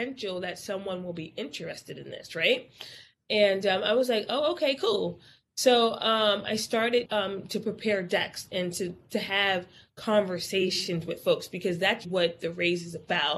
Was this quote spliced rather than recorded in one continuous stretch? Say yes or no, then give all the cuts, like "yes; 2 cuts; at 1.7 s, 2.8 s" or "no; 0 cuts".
yes; 2 cuts; at 7.1 s, 12.0 s